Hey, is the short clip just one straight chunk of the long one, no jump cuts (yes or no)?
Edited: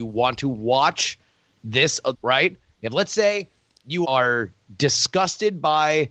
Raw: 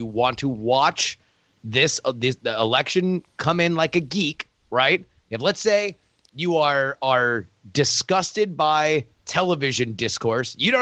no